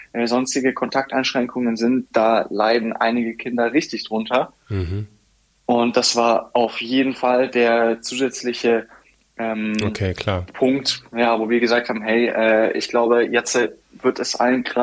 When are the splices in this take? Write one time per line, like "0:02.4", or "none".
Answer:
none